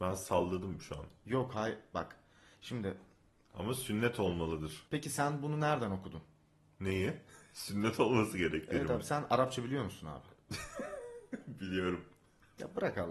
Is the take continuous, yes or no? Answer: yes